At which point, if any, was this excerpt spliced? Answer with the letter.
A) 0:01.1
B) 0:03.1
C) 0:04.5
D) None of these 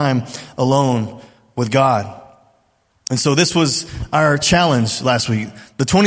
D